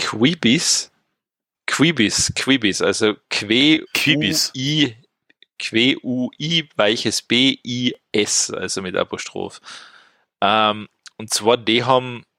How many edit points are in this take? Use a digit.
1